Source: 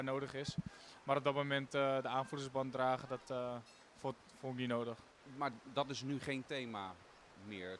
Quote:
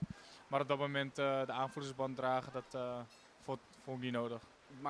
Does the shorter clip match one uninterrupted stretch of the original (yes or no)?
yes